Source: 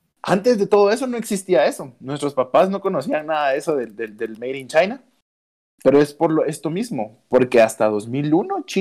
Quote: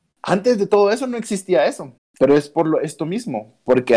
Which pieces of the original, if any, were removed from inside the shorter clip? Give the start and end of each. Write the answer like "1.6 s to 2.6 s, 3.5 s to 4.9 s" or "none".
2.0 s to 5.6 s